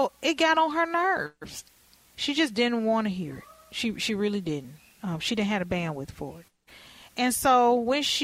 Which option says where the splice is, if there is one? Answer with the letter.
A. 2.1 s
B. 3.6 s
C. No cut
A